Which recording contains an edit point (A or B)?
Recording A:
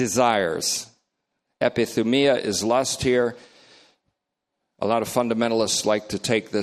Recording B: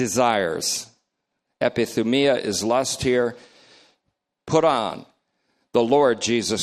B